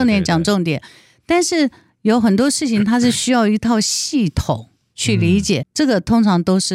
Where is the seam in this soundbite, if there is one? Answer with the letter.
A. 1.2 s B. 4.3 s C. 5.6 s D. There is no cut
C